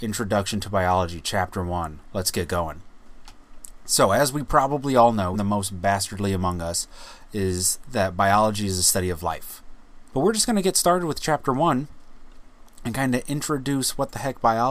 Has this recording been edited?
yes; 2 cuts; at 5.3 s, 10.1 s

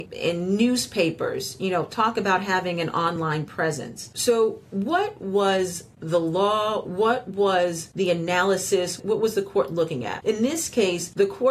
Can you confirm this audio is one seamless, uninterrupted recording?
yes; 0 cuts

